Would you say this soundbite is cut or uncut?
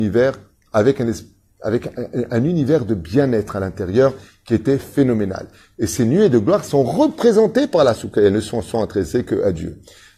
uncut